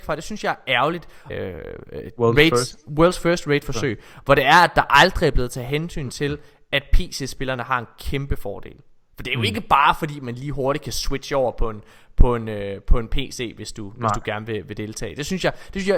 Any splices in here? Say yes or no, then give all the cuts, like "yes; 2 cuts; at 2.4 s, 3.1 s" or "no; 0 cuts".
yes; 1 cut; at 1.3 s